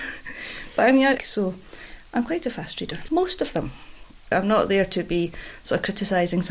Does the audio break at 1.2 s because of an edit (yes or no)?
yes